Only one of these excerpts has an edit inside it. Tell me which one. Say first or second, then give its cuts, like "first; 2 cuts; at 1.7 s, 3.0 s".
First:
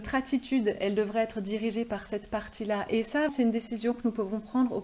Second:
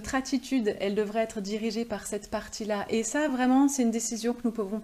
first; 1 cut; at 3.3 s